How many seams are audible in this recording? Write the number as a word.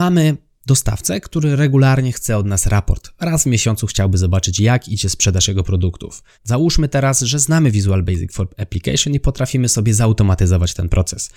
one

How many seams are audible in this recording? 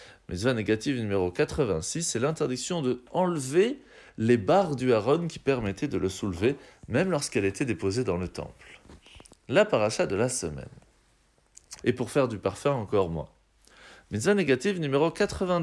one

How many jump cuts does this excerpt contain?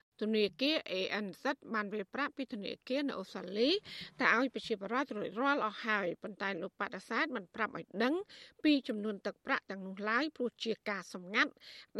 zero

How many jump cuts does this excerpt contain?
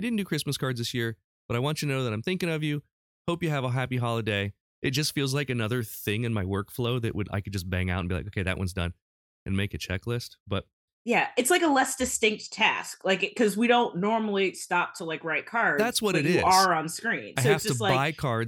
one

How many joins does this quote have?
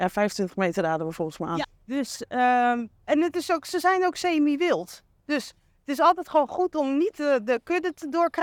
one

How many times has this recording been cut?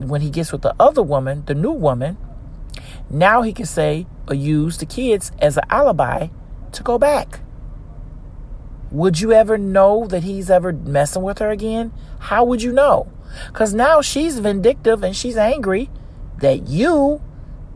zero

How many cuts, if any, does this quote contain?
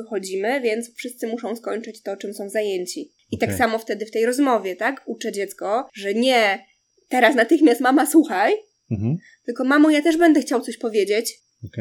zero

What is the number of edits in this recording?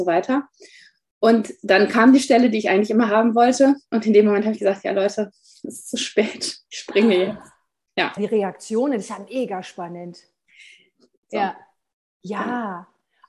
two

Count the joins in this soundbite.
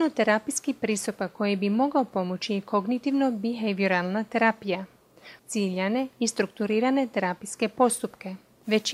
one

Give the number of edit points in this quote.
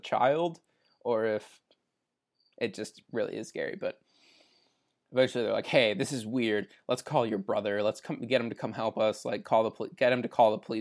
zero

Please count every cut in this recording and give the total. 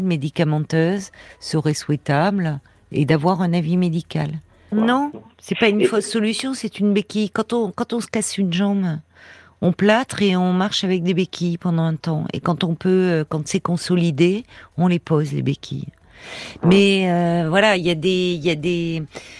one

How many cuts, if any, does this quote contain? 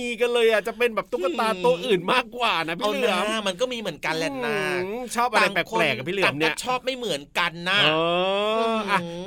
zero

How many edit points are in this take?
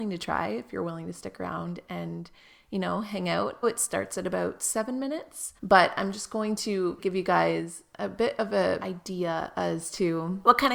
three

